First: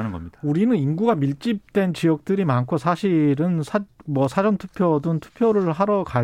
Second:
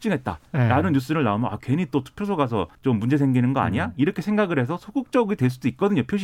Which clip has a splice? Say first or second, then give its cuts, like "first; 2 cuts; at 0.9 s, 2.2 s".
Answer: second; 1 cut; at 2.8 s